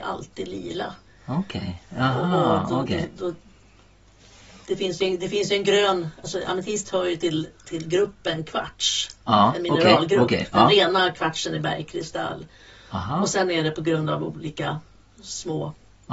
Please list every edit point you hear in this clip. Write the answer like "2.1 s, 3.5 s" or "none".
none